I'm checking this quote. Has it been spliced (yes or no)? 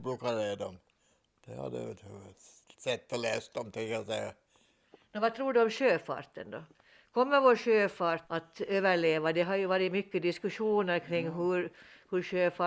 yes